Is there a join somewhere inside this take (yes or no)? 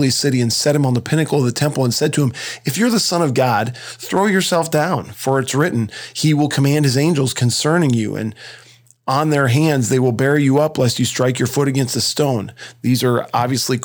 no